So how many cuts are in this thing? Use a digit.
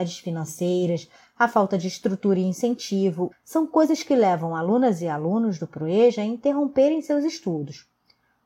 1